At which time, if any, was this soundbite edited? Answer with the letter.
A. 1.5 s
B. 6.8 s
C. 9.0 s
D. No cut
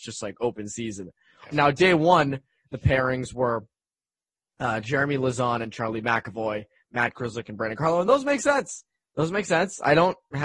A